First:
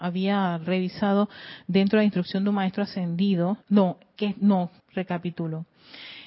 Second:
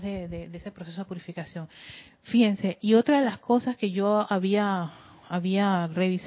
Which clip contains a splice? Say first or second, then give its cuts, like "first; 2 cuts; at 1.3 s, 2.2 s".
first; 2 cuts; at 3.6 s, 4.8 s